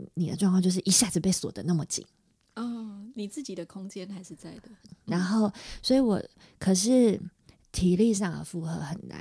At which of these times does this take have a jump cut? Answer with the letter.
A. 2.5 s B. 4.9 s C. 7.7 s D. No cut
B